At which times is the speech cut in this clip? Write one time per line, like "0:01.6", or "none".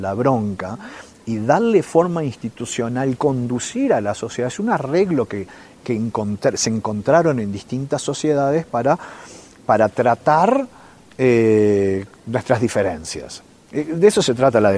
none

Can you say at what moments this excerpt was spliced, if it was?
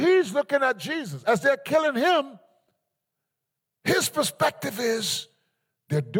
none

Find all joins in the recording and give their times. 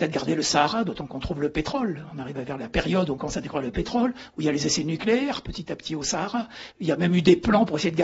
0:06.7

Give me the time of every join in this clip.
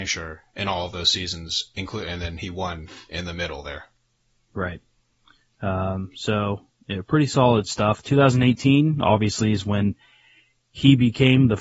none

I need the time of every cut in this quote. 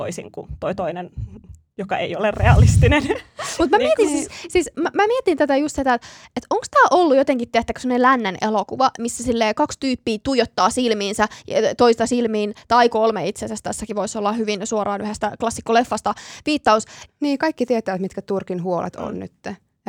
0:17.1

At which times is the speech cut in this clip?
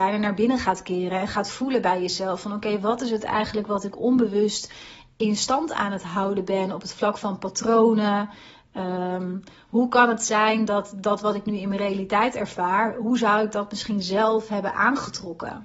none

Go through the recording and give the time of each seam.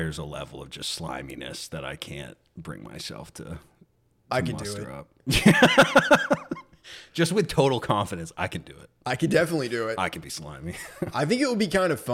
none

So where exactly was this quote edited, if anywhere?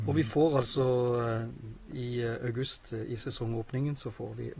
none

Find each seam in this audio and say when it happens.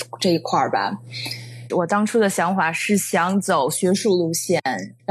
0:01.7

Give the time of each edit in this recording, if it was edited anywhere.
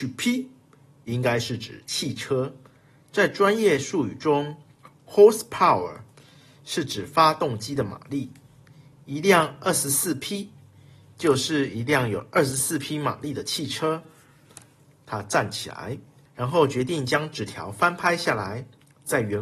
0:16.3

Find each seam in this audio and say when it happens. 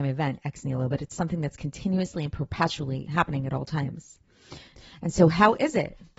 0:03.0

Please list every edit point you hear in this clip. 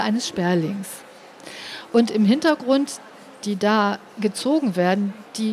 0:01.9
0:03.4

